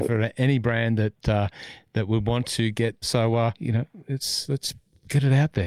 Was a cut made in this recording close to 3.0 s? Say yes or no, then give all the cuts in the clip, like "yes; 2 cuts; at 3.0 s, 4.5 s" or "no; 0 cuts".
yes; 1 cut; at 3.0 s